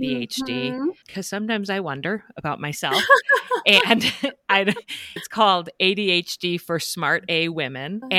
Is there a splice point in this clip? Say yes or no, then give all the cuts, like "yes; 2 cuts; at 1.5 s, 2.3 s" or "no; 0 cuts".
no; 0 cuts